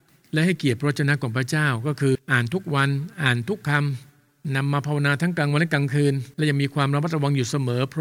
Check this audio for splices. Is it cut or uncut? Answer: cut